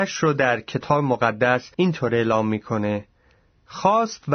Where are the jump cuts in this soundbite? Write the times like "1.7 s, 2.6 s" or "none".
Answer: 1.7 s